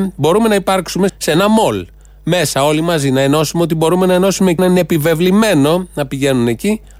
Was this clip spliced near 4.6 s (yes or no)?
yes